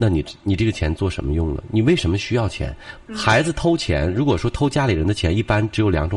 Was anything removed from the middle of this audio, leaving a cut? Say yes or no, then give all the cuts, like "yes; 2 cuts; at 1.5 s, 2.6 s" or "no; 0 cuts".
yes; 1 cut; at 3.0 s